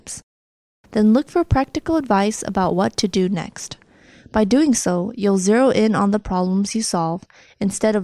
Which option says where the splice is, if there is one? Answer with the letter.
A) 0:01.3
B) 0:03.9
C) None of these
C